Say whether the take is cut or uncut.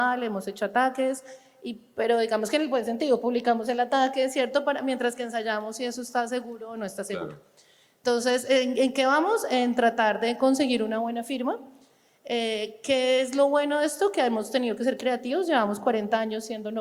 uncut